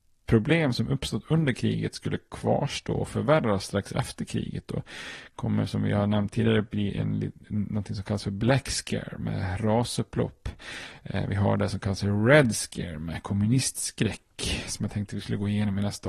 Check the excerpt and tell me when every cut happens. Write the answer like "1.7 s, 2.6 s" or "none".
none